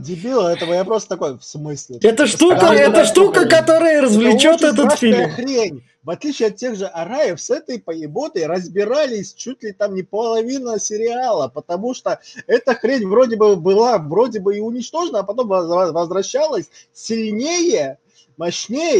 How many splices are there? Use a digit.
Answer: 1